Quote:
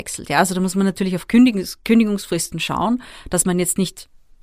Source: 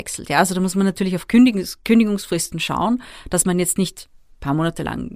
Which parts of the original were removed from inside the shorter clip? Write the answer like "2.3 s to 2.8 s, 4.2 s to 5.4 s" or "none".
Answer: none